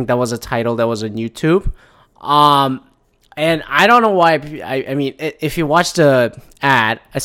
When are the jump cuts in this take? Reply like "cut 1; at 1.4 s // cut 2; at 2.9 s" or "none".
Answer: none

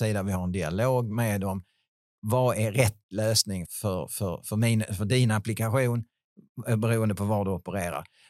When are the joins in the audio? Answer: cut 1; at 3.6 s

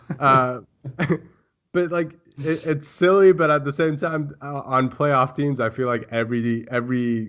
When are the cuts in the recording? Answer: none

